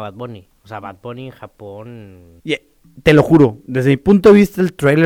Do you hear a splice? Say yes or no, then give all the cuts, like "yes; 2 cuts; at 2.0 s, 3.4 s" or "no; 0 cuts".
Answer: yes; 1 cut; at 2.4 s